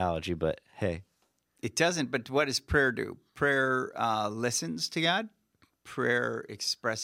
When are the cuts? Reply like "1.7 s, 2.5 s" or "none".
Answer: none